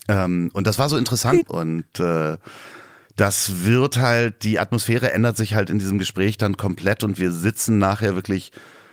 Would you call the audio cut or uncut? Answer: cut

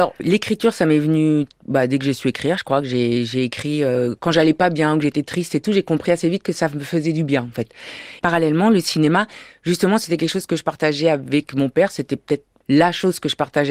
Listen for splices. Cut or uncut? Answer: uncut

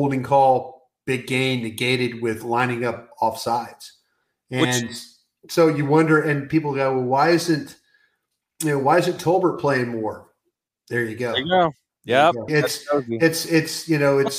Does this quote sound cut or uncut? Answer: cut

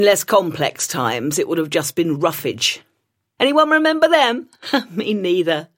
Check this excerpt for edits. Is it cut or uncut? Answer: cut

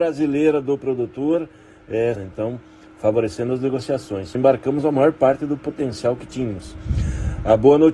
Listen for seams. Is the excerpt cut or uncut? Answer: cut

